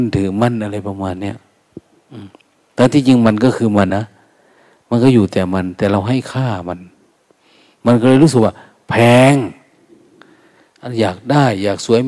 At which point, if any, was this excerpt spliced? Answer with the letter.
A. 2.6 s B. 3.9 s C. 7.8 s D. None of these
B